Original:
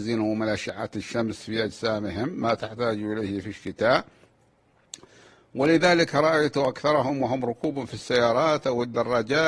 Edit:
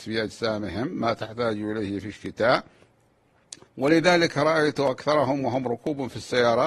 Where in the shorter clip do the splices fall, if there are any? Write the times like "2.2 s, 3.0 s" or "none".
3.6 s